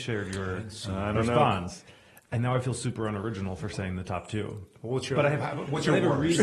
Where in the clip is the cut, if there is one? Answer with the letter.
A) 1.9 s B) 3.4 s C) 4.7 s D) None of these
D